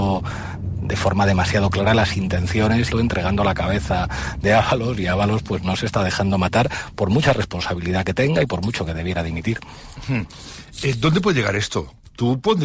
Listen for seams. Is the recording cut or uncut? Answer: cut